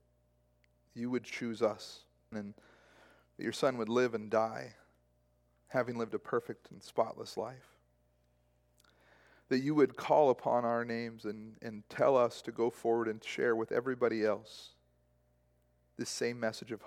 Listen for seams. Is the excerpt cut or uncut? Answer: cut